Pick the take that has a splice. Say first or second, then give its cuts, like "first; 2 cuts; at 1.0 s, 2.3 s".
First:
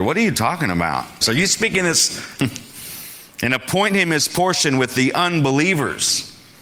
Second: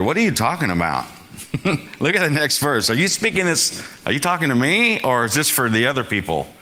first; 2 cuts; at 1.2 s, 2.4 s